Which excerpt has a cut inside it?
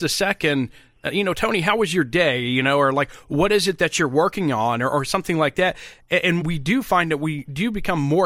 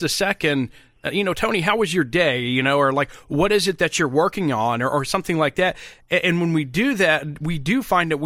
first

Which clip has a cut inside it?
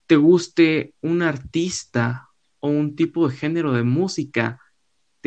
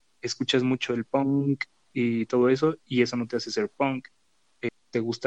second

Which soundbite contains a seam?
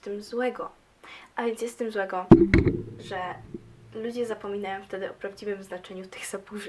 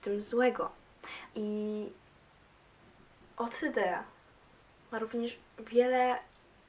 second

